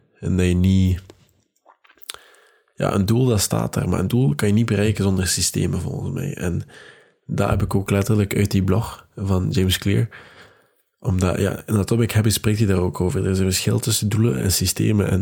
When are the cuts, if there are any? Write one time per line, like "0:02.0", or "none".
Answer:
none